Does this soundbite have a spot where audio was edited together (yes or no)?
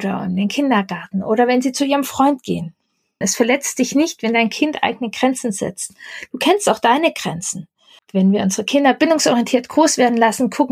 yes